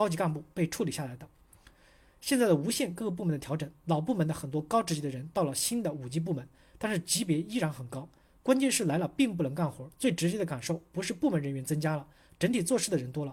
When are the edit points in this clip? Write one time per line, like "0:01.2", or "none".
none

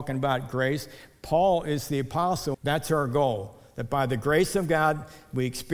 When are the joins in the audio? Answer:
0:02.5

